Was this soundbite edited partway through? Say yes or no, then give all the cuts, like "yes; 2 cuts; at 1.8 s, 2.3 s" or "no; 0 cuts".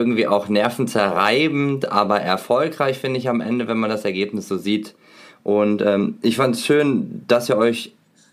no; 0 cuts